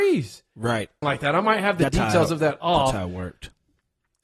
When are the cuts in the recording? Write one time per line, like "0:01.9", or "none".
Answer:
0:01.0